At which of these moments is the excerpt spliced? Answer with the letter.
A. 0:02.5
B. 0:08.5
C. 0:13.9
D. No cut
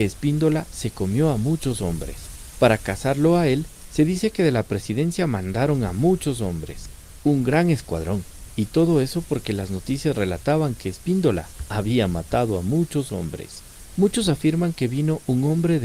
D